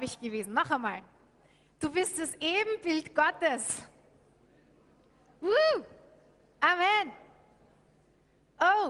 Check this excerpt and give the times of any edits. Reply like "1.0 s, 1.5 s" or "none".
none